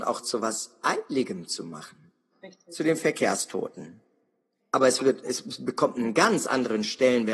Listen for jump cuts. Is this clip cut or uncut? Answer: cut